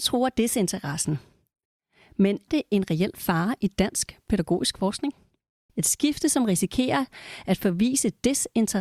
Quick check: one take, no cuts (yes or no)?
no